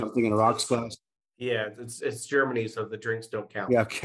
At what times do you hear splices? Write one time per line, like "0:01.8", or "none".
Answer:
none